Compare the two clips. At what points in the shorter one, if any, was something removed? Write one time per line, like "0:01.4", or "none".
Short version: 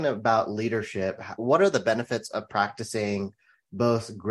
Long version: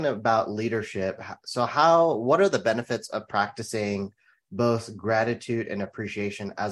0:01.4